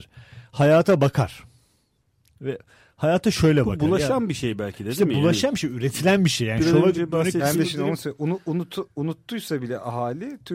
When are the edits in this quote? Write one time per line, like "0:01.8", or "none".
none